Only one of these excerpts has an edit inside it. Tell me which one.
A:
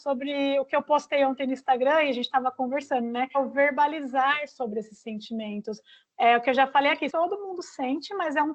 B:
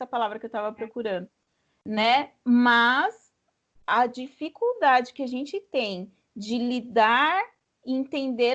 A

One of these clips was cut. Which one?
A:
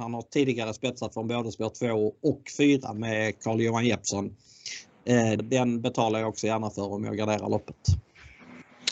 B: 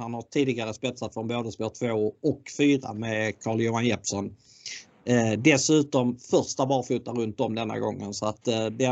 A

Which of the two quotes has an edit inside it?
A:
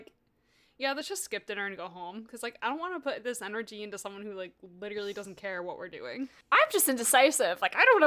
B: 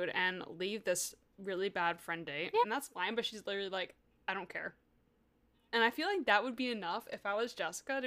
B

